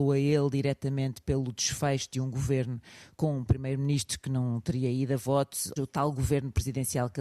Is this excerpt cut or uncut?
cut